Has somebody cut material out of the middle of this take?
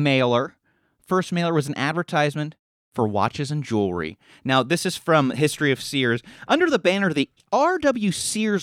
no; 0 cuts

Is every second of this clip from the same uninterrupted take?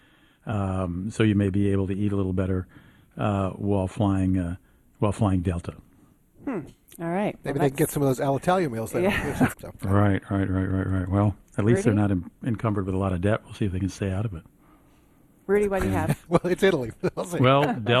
no; 1 cut; at 9.5 s

